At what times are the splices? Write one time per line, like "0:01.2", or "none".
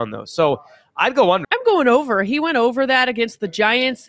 0:01.4